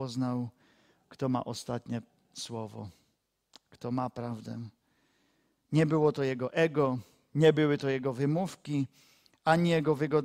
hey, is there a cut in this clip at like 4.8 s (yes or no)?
no